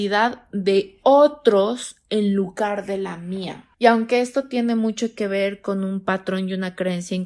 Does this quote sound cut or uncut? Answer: cut